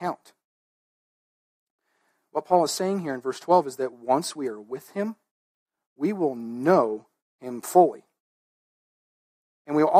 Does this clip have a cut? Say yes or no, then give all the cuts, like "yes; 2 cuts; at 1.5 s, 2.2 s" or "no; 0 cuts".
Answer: no; 0 cuts